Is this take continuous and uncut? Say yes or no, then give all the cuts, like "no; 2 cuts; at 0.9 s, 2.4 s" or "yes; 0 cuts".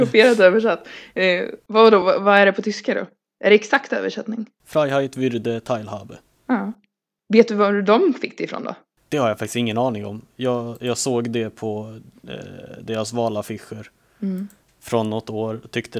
yes; 0 cuts